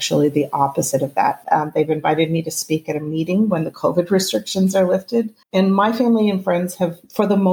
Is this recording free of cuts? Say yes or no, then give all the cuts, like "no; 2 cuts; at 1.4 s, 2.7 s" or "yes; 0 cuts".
no; 2 cuts; at 1.4 s, 5.4 s